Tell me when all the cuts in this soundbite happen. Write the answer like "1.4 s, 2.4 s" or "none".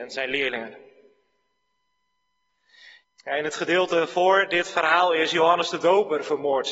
3.0 s